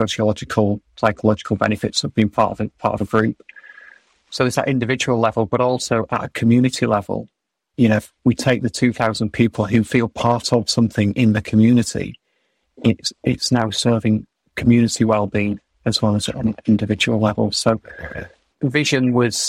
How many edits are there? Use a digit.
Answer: 1